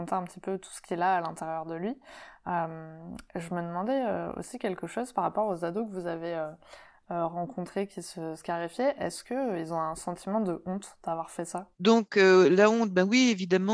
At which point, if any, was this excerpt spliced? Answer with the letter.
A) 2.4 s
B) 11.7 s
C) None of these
B